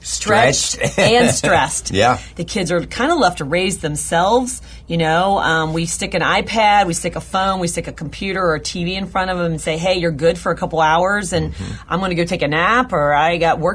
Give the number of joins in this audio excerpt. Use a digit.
1